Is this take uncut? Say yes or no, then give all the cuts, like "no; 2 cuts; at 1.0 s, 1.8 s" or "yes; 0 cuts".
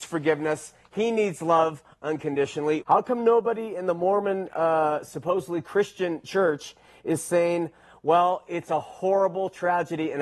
no; 1 cut; at 2.8 s